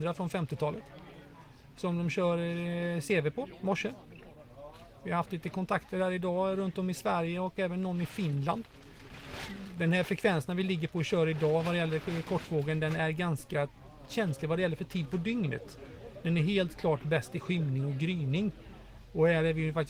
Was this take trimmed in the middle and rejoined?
no; 0 cuts

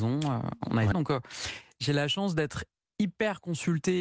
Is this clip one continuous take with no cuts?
no; 1 cut; at 0.9 s

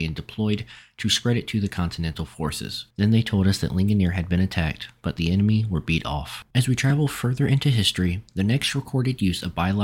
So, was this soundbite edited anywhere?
yes; 2 cuts; at 2.9 s, 6.5 s

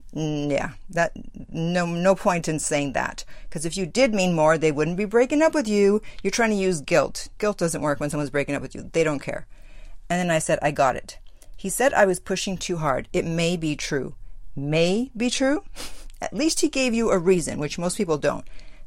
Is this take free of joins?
yes; 0 cuts

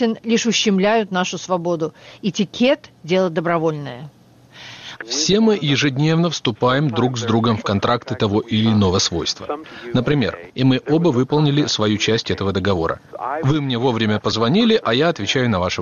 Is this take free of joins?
no; 2 cuts; at 5.0 s, 10.5 s

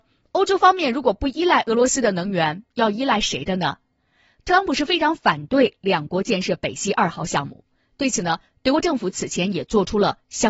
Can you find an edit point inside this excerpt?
no; 0 cuts

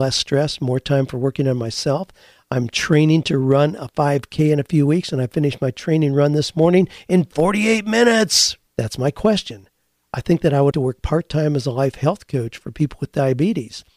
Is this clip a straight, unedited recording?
no; 2 cuts; at 8.7 s, 10.7 s

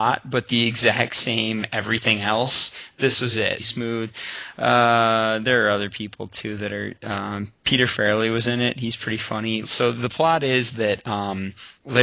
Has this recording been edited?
yes; 2 cuts; at 3.6 s, 9.6 s

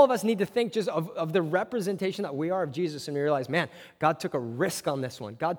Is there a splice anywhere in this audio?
no; 0 cuts

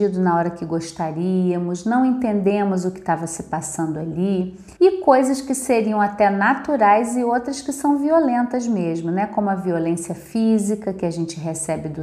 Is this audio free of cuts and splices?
no; 1 cut; at 4.8 s

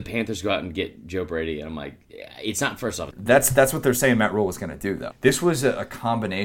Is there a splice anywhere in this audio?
yes; 2 cuts; at 3.1 s, 5.1 s

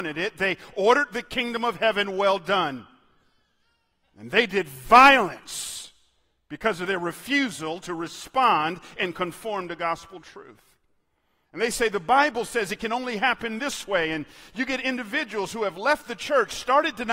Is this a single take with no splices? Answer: no; 1 cut; at 11.4 s

